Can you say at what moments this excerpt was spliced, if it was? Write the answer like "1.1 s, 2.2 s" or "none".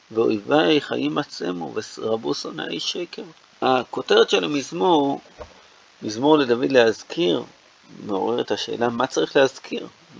3.5 s